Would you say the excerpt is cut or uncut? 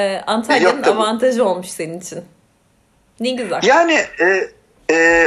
uncut